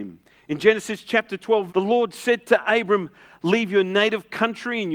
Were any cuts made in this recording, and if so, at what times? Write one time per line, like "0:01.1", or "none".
0:01.7